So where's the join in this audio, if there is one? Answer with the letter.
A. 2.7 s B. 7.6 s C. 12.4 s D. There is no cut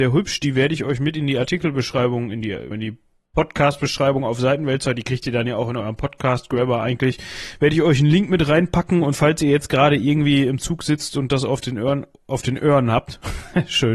A